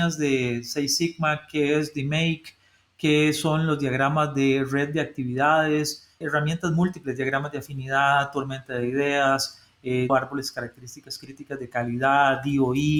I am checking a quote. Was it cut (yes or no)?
yes